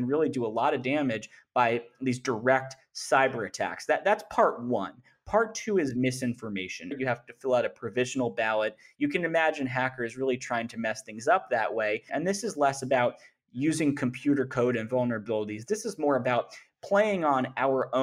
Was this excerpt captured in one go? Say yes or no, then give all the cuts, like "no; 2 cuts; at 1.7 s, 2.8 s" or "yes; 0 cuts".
no; 2 cuts; at 6.9 s, 12.1 s